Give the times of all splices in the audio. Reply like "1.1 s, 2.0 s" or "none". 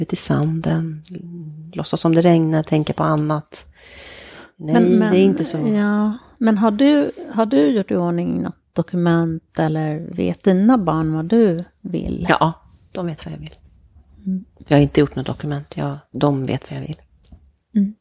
none